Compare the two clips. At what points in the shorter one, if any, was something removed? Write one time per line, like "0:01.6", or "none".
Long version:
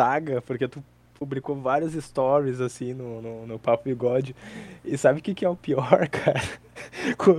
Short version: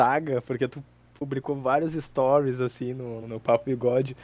0:03.2